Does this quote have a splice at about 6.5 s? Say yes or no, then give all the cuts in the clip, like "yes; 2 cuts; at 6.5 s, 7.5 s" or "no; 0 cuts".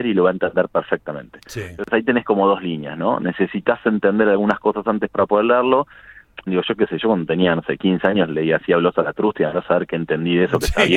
yes; 1 cut; at 6.5 s